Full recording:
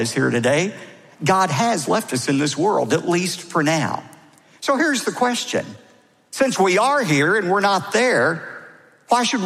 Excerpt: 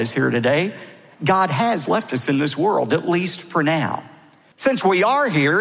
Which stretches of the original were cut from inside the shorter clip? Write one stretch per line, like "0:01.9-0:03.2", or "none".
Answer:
0:04.5-0:06.3